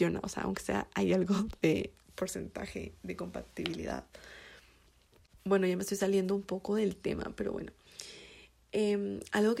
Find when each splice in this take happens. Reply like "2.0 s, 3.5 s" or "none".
none

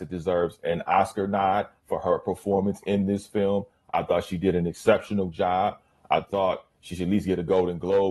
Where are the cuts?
none

